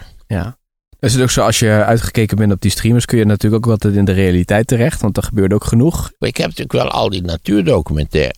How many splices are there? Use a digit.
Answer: 0